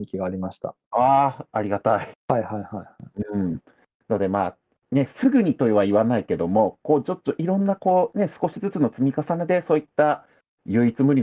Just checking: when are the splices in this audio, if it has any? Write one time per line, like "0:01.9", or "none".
0:02.1